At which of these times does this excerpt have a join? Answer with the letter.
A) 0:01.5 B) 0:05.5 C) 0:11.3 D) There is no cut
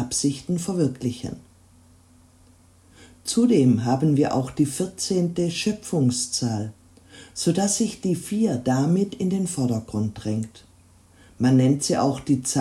D